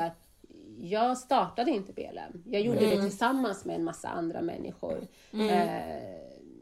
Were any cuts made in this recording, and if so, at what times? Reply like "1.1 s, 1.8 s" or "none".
none